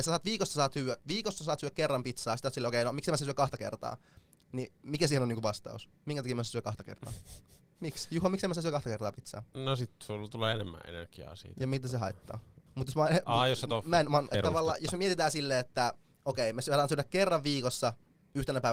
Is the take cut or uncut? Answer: cut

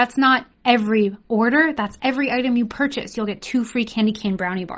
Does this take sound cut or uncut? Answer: uncut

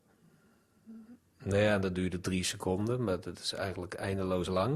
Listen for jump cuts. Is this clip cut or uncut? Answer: uncut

